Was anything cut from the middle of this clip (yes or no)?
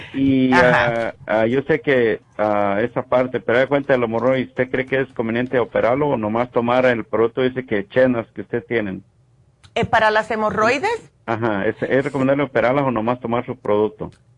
yes